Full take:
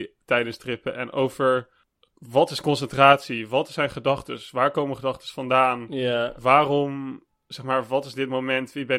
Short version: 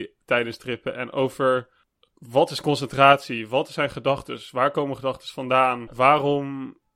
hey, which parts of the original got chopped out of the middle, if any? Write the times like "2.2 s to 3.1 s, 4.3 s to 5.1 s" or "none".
5.9 s to 6.3 s